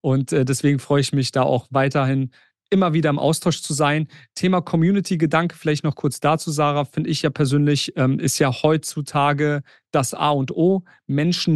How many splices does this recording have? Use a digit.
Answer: 0